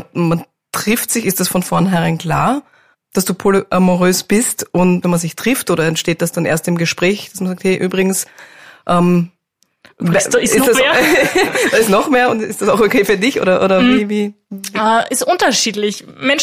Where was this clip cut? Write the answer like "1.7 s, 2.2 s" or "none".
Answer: 5.0 s